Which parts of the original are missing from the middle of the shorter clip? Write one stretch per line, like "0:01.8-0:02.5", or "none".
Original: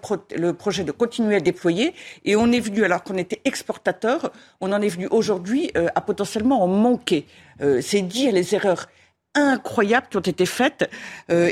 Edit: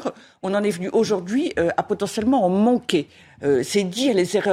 none